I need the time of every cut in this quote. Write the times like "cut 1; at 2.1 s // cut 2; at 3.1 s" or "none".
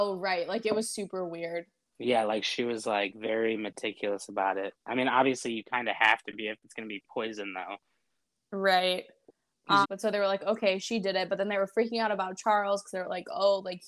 cut 1; at 9.8 s

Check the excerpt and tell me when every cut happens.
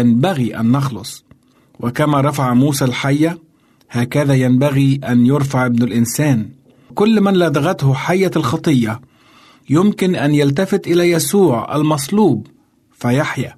none

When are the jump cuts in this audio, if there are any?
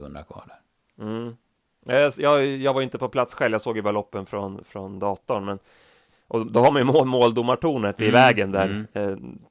none

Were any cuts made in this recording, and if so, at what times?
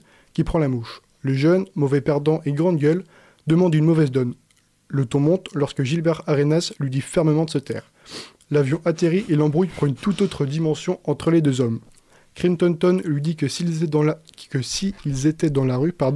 none

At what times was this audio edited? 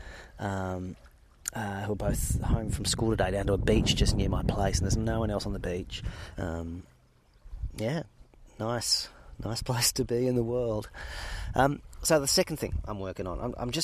cut 1; at 6.3 s

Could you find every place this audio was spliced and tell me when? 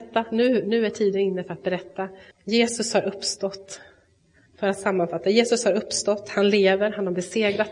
cut 1; at 2.3 s

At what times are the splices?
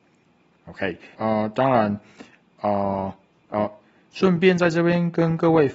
cut 1; at 1.1 s // cut 2; at 3.5 s

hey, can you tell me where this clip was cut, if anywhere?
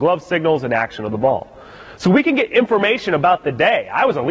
none

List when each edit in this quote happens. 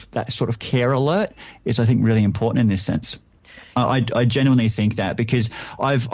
cut 1; at 3.7 s

